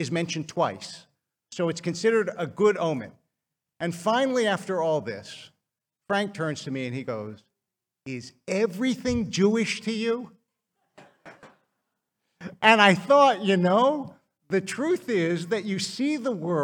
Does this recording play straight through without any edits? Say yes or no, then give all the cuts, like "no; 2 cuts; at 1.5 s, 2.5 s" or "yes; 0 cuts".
yes; 0 cuts